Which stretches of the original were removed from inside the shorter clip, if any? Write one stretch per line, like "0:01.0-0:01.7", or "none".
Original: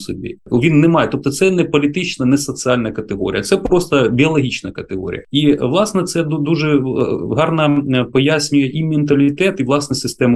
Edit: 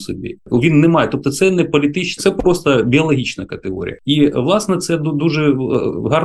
0:02.2-0:03.4